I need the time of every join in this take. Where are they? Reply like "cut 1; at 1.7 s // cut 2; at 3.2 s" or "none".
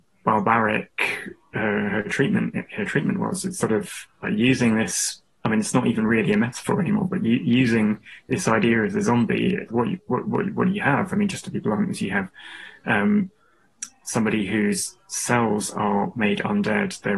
cut 1; at 9.7 s